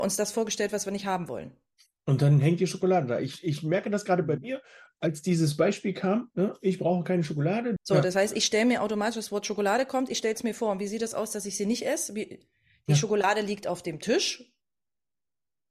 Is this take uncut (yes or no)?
no